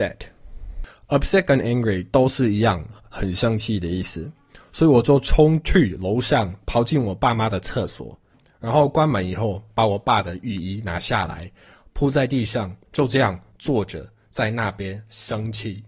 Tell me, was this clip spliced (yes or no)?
no